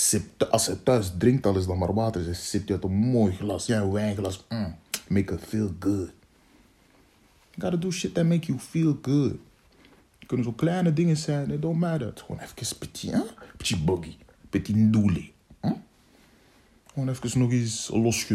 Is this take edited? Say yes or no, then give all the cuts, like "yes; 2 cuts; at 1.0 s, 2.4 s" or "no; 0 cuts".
yes; 2 cuts; at 3.7 s, 12.1 s